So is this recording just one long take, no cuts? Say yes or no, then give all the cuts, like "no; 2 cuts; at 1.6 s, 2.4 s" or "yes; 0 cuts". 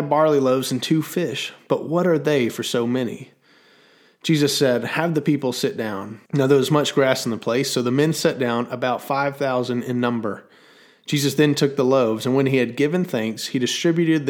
no; 1 cut; at 6.3 s